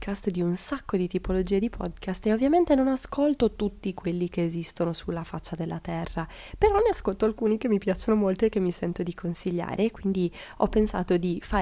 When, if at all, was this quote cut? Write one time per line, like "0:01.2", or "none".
none